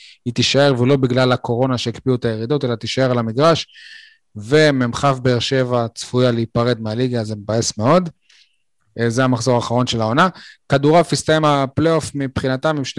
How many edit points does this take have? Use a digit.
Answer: 0